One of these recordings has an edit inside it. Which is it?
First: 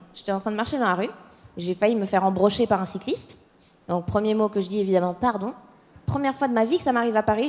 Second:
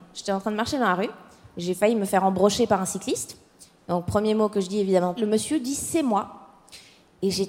second; 1 cut; at 5.2 s

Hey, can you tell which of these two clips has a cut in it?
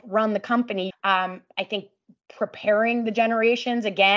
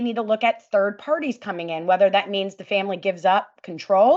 first; 1 cut; at 0.9 s

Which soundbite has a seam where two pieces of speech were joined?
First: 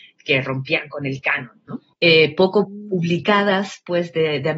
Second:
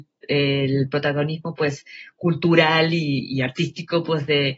first; 1 cut; at 1.9 s

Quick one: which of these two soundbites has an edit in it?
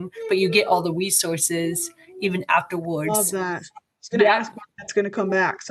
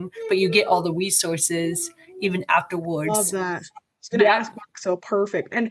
second; 1 cut; at 4.7 s

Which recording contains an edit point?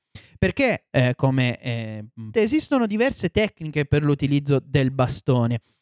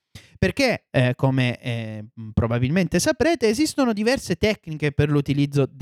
first; 1 cut; at 2.3 s

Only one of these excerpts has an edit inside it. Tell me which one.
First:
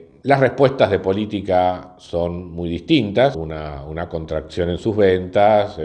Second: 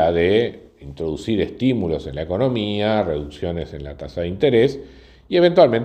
first; 1 cut; at 3.3 s

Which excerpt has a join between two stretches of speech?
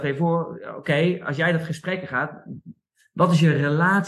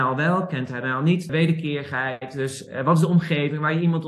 second; 1 cut; at 1.3 s

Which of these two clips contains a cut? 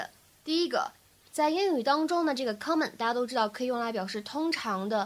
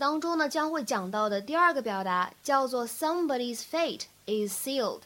first; 1 cut; at 1.3 s

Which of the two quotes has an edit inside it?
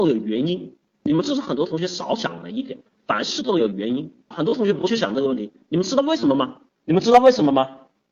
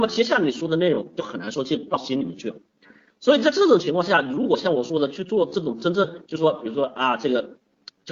first; 2 cuts; at 4.3 s, 6.7 s

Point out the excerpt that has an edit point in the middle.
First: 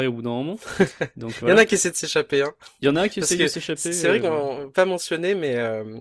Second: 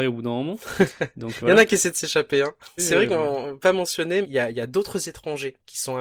second; 2 cuts; at 2.8 s, 4.2 s

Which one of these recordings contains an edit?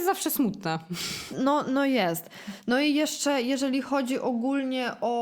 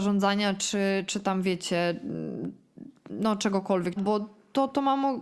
second; 1 cut; at 4.0 s

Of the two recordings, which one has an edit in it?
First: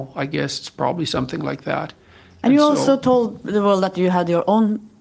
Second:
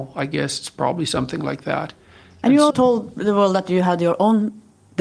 second; 1 cut; at 2.7 s

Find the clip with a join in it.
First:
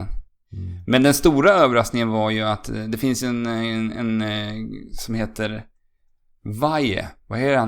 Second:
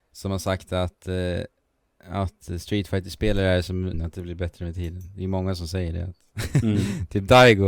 second; 1 cut; at 3.9 s

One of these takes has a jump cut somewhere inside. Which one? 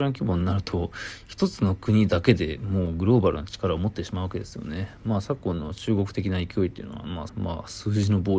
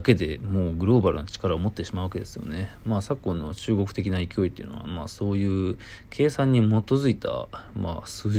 first; 1 cut; at 7.3 s

